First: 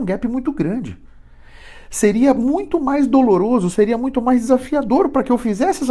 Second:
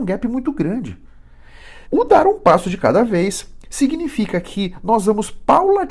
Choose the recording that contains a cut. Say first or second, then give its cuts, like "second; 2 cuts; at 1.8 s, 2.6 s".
second; 1 cut; at 1.9 s